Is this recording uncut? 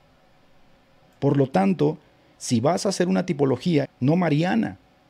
no; 2 cuts; at 1.2 s, 3.8 s

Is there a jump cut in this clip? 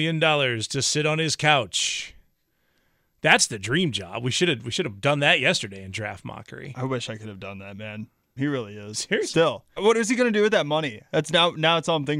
yes; 2 cuts; at 8.4 s, 9.8 s

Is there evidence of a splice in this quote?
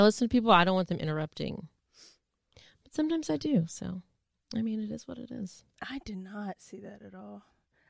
no; 0 cuts

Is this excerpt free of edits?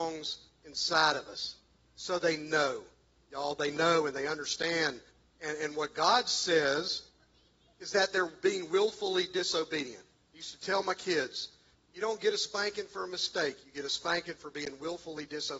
yes; 0 cuts

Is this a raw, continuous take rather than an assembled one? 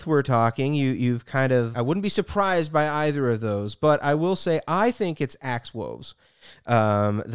no; 1 cut; at 1.7 s

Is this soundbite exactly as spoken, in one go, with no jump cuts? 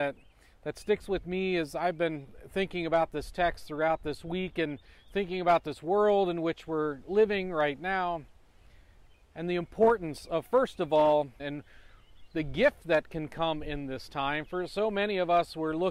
no; 1 cut; at 11.4 s

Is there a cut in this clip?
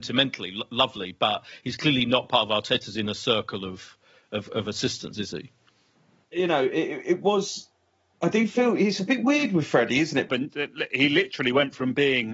yes; 2 cuts; at 6.2 s, 10.3 s

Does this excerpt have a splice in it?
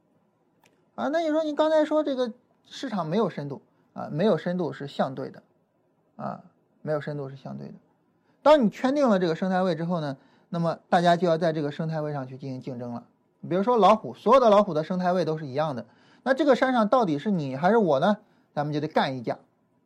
no; 0 cuts

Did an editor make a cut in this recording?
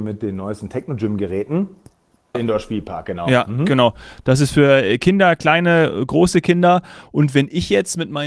yes; 1 cut; at 2.3 s

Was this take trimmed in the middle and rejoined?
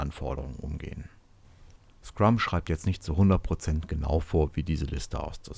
yes; 1 cut; at 1.8 s

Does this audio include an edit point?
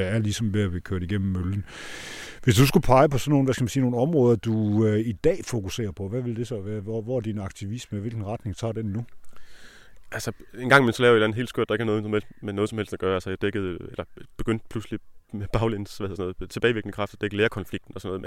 no; 0 cuts

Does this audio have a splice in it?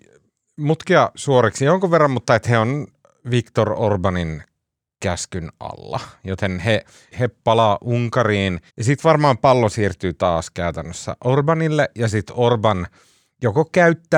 yes; 2 cuts; at 7.1 s, 8.7 s

